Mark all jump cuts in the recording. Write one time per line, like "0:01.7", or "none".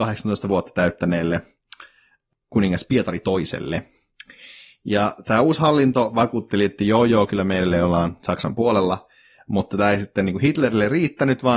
none